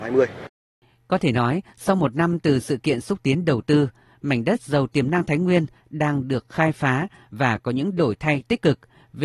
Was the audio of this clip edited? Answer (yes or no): no